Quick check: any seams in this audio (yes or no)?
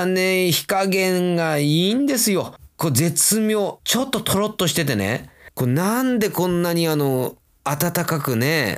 no